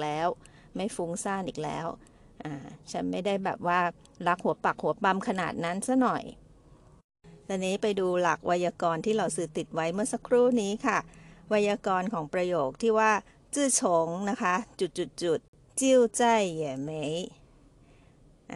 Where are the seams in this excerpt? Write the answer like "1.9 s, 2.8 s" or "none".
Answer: none